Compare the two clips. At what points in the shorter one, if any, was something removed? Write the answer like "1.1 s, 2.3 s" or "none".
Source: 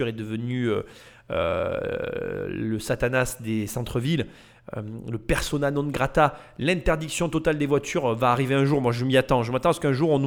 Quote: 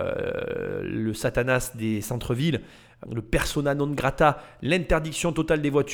3.0 s